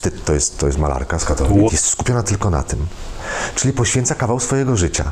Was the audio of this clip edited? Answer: yes; 1 cut; at 1.7 s

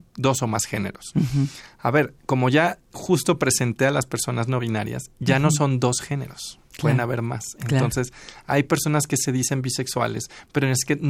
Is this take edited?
no; 0 cuts

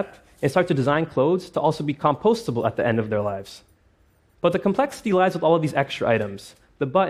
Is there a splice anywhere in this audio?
yes; 1 cut; at 4.3 s

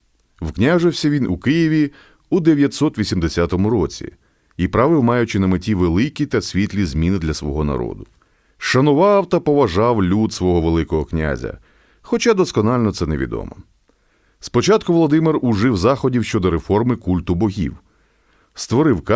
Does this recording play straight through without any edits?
yes; 0 cuts

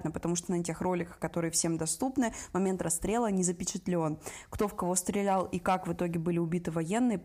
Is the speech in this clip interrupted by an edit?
no; 0 cuts

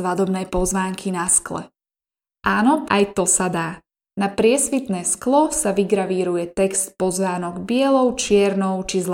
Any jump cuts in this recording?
yes; 1 cut; at 2.9 s

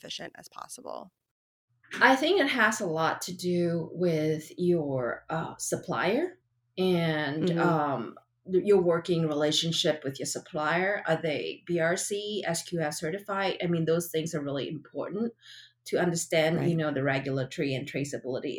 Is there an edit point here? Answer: no; 0 cuts

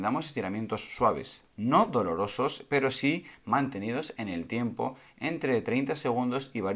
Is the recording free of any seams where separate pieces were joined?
yes; 0 cuts

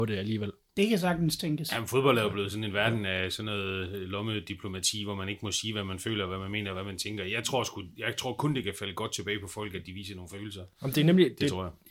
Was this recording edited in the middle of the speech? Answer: no; 0 cuts

